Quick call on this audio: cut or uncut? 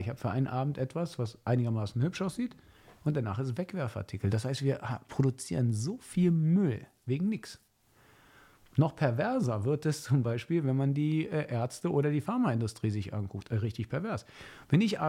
uncut